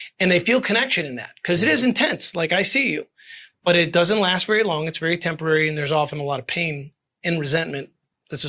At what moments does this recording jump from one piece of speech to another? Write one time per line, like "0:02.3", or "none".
none